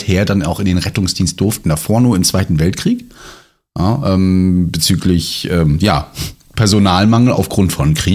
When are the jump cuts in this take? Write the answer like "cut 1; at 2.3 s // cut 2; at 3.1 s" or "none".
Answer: none